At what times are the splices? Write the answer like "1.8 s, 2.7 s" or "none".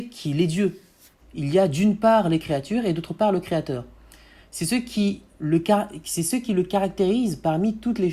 1.2 s